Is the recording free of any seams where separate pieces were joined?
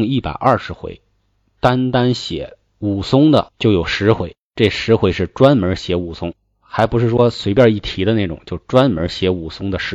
yes; 0 cuts

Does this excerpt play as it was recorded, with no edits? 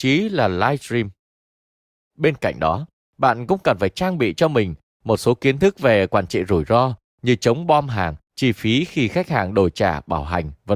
no; 1 cut; at 8.2 s

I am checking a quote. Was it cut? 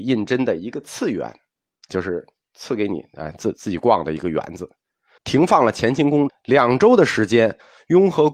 yes; 2 cuts; at 5.2 s, 6.3 s

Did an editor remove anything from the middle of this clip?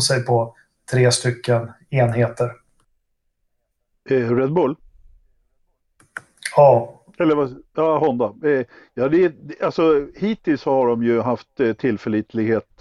no; 0 cuts

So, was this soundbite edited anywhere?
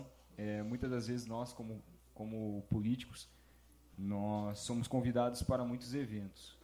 no; 0 cuts

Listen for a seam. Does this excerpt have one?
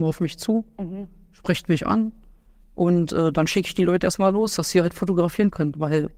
no; 0 cuts

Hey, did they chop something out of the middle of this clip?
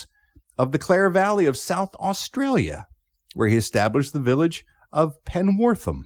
no; 0 cuts

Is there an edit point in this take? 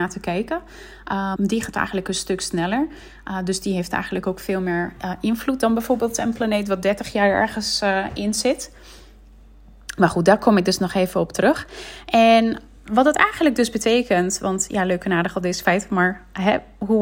yes; 1 cut; at 1.4 s

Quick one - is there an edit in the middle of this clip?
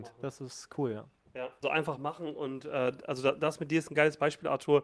yes; 1 cut; at 1.6 s

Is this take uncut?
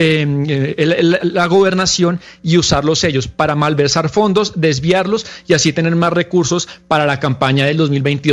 no; 1 cut; at 1.2 s

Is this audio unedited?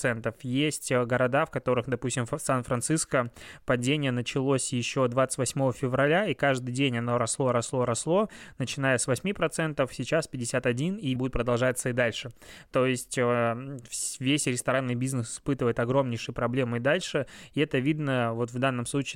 no; 1 cut; at 11.2 s

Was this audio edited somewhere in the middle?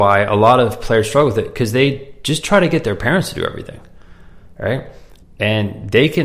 yes; 1 cut; at 5.2 s

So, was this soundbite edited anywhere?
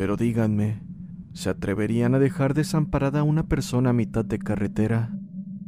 no; 0 cuts

